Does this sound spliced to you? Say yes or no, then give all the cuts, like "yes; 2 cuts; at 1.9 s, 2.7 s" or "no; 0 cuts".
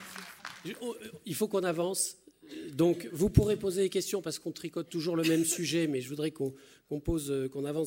no; 0 cuts